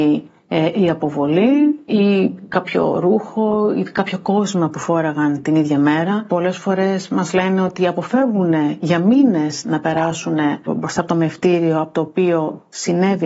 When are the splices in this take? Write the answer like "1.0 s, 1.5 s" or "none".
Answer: none